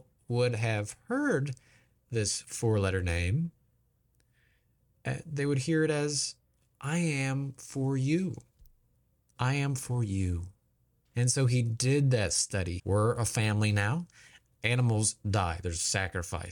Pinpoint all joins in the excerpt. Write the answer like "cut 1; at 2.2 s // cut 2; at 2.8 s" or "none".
cut 1; at 11.1 s // cut 2; at 12.8 s // cut 3; at 14.5 s